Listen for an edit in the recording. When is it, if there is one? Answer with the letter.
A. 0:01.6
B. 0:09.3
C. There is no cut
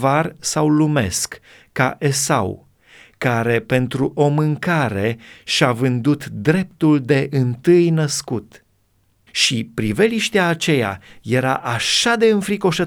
B